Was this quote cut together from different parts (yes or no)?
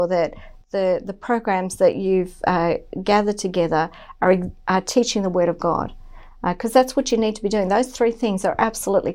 no